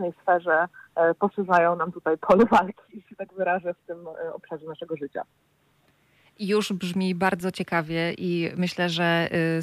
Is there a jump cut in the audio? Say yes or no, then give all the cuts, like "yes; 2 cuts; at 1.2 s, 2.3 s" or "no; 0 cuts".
no; 0 cuts